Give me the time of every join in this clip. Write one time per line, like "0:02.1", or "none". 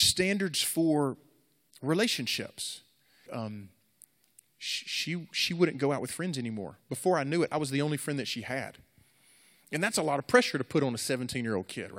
0:03.3